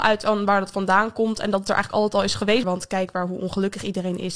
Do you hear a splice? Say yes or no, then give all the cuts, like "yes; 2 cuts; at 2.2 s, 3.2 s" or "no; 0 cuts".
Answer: yes; 1 cut; at 2.6 s